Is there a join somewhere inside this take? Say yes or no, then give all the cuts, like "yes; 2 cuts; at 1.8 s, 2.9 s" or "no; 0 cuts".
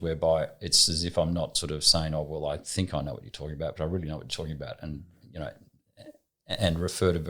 yes; 1 cut; at 3.8 s